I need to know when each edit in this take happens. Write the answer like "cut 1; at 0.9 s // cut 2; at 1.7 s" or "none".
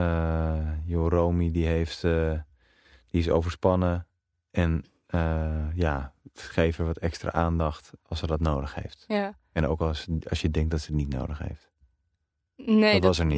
none